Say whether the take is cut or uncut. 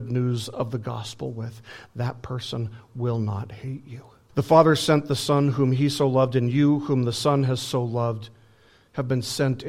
cut